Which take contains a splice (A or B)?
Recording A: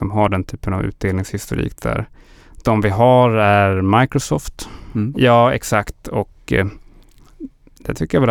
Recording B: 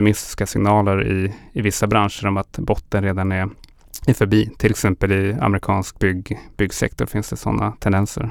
A